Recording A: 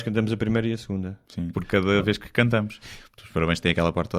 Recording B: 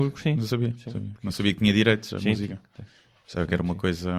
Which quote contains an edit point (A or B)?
A